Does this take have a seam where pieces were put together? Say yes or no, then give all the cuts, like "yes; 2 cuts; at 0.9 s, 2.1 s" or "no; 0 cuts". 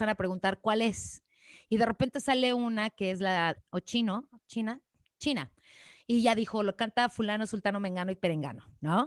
yes; 1 cut; at 3.5 s